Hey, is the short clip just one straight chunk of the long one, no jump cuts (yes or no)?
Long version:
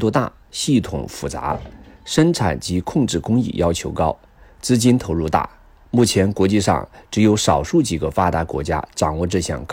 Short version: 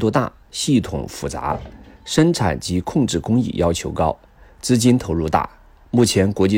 yes